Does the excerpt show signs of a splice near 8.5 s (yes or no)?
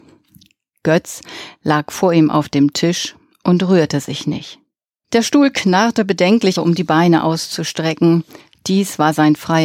no